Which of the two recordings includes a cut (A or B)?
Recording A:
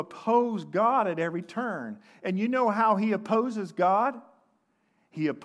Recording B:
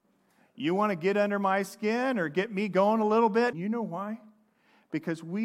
B